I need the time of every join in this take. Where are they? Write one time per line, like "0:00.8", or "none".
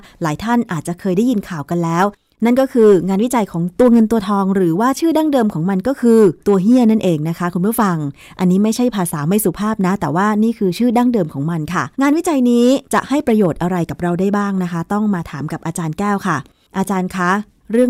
0:06.4
0:11.9